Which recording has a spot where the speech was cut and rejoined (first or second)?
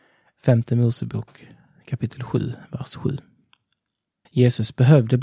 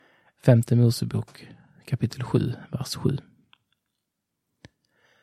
first